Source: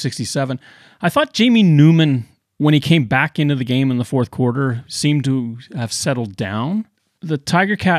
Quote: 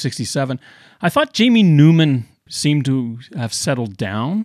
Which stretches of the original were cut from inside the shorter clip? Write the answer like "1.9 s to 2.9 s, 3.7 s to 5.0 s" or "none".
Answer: 2.5 s to 4.9 s